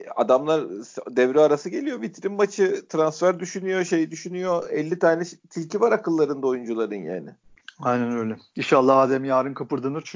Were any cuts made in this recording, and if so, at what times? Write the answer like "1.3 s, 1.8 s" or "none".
none